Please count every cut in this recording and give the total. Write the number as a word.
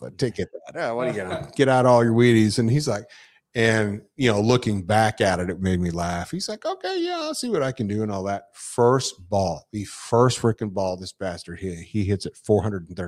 zero